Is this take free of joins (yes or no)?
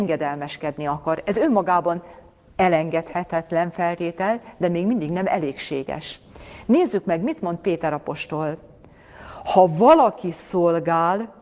yes